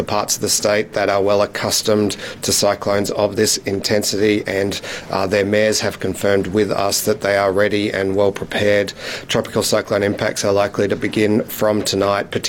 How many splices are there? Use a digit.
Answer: 0